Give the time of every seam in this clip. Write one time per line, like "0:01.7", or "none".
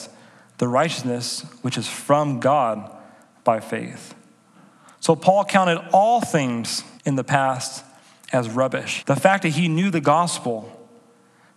0:07.0
0:09.0